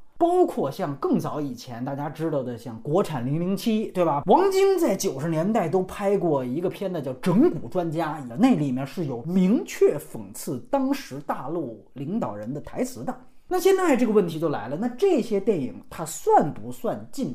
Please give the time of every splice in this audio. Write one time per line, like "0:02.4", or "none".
0:04.2
0:08.3